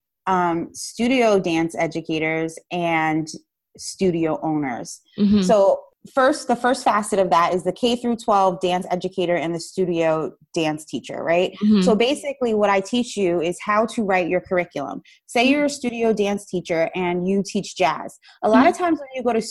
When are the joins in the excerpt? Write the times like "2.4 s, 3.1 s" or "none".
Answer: none